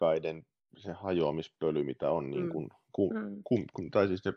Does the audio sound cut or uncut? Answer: uncut